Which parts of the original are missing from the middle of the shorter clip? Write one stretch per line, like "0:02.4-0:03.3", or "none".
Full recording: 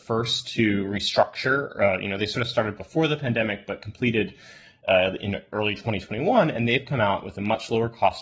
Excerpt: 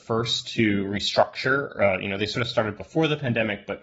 none